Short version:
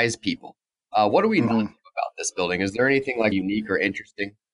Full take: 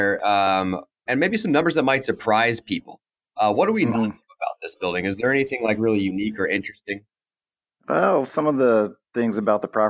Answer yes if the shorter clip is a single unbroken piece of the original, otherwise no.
no